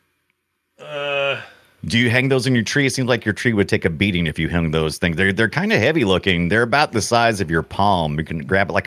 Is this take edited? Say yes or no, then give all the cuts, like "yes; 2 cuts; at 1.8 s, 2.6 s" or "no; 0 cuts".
no; 0 cuts